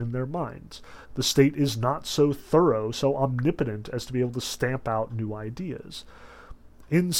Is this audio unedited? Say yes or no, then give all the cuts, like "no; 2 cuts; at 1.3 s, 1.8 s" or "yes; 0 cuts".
no; 2 cuts; at 1.0 s, 2.9 s